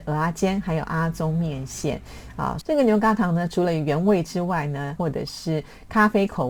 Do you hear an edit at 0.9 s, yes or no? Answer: no